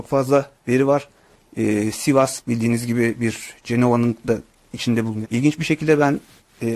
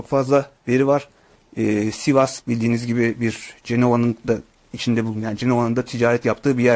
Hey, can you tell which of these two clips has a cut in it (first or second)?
first